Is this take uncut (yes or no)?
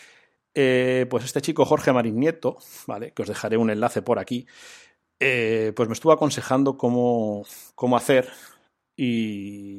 yes